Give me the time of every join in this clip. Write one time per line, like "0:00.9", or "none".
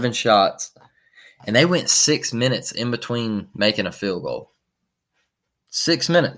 none